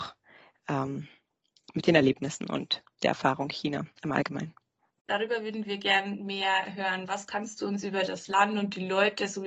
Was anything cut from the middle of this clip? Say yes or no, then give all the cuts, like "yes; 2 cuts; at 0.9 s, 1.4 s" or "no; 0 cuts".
no; 0 cuts